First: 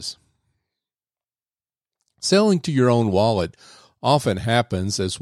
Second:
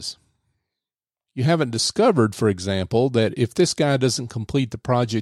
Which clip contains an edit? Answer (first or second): second